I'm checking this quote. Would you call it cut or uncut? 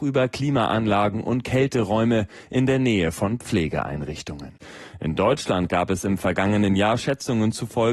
uncut